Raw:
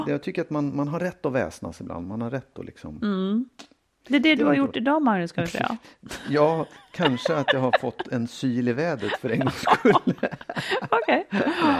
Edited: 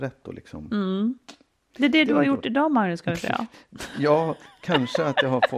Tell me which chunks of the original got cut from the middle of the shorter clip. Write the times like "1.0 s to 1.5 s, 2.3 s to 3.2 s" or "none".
none